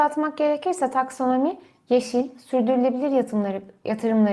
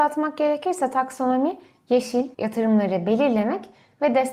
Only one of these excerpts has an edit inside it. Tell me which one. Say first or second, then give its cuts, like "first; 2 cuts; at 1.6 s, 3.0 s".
second; 1 cut; at 2.3 s